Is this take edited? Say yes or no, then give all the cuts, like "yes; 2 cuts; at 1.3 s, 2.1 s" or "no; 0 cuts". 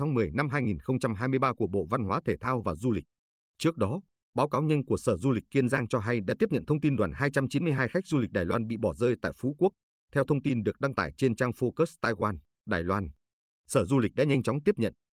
no; 0 cuts